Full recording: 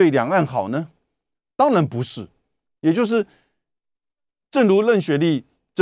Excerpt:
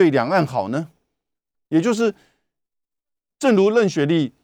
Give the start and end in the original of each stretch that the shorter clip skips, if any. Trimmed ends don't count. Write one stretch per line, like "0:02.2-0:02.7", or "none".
0:01.5-0:02.7